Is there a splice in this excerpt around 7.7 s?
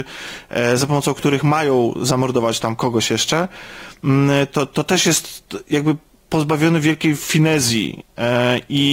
no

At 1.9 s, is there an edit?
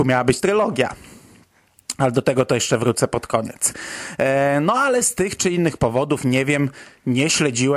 no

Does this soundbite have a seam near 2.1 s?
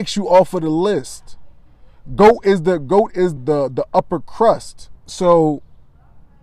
no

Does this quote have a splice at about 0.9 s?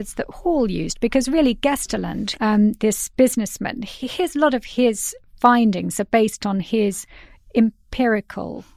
no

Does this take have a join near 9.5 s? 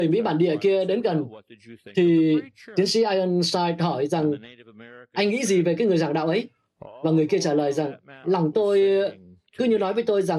no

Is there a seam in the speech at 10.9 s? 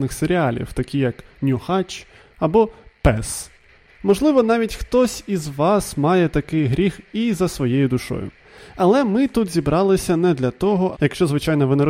yes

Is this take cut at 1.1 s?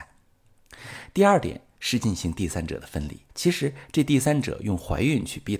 no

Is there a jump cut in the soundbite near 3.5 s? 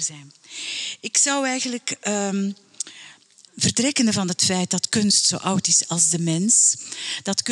yes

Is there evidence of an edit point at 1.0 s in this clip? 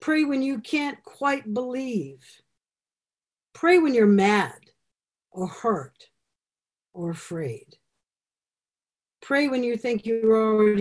no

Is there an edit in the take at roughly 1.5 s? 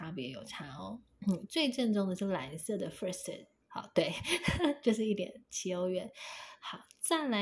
no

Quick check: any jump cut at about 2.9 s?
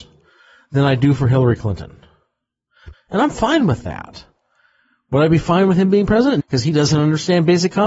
yes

